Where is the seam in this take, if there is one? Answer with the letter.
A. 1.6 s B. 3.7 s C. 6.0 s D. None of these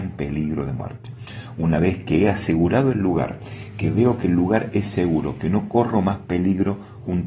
D